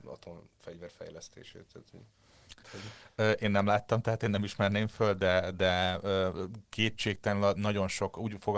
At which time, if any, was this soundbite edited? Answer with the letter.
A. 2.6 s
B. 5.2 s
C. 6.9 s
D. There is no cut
A